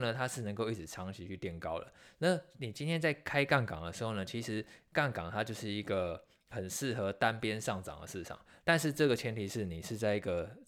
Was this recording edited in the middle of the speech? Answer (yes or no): yes